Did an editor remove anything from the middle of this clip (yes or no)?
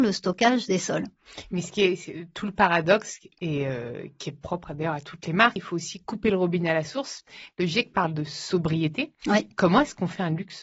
yes